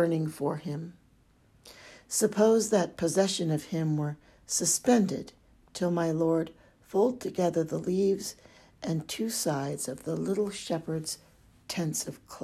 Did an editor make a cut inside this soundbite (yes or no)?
no